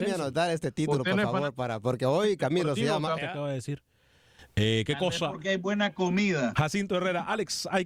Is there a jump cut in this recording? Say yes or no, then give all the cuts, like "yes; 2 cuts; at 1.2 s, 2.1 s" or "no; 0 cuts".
yes; 2 cuts; at 3.2 s, 6.5 s